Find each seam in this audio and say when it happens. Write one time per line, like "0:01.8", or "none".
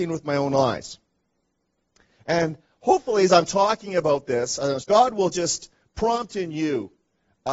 0:04.8